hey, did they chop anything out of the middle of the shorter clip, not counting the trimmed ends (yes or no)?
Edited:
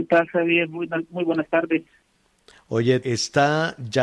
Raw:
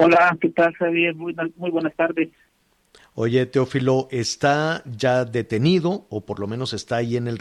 yes